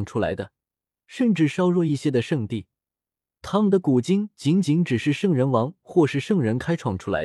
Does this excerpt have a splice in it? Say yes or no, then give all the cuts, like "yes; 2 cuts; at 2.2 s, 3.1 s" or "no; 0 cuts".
no; 0 cuts